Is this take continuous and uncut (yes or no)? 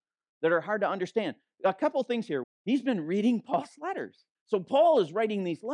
no